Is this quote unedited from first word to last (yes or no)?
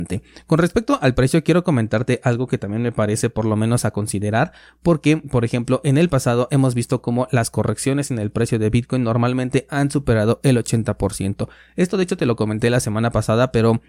yes